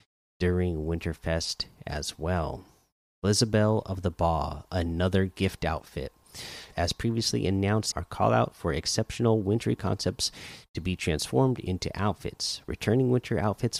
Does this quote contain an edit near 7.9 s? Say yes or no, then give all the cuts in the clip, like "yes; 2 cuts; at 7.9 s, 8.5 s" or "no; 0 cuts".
yes; 2 cuts; at 6.7 s, 7.9 s